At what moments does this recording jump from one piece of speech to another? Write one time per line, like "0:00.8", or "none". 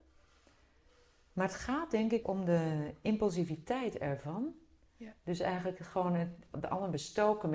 0:02.2